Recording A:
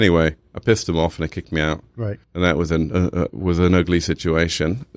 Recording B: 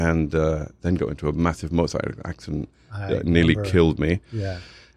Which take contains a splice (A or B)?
A